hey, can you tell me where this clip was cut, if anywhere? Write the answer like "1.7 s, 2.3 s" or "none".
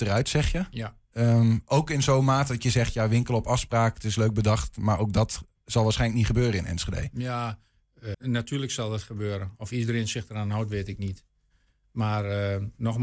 8.1 s